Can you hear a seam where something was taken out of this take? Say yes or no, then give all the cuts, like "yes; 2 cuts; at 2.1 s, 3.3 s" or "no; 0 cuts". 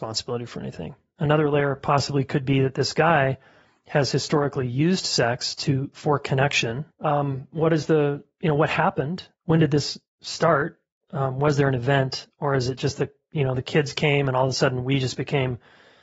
yes; 1 cut; at 6.9 s